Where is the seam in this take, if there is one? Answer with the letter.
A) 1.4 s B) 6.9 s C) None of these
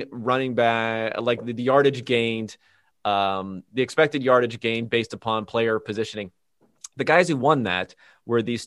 C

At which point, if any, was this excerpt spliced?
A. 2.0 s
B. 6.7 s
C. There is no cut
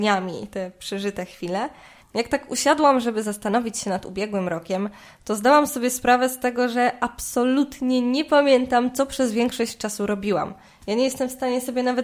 A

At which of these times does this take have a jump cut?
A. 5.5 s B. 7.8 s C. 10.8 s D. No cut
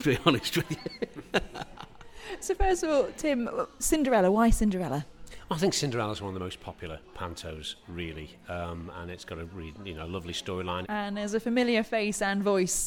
C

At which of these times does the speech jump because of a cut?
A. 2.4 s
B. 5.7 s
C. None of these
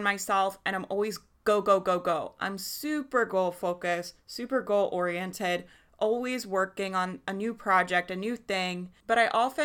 C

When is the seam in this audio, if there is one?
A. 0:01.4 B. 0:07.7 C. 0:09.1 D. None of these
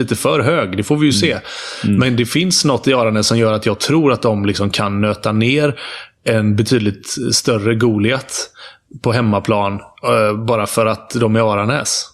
D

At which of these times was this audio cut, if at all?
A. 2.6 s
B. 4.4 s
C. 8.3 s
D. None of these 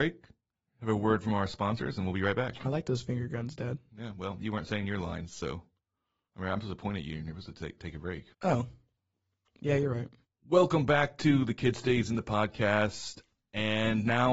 C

